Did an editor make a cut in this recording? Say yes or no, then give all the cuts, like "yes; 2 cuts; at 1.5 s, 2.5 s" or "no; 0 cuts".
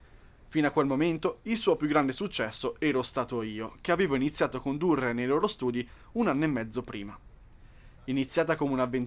no; 0 cuts